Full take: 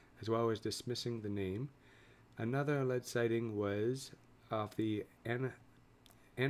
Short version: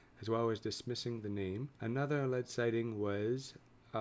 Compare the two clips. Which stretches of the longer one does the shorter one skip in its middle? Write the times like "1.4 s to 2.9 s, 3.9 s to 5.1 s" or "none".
1.7 s to 2.3 s